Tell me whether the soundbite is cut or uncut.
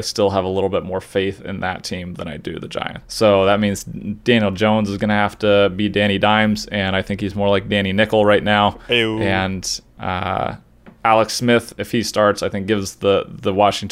cut